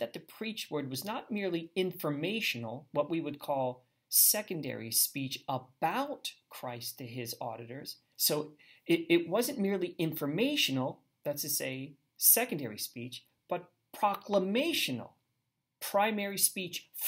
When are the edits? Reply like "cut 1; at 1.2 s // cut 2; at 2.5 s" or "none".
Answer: cut 1; at 8.1 s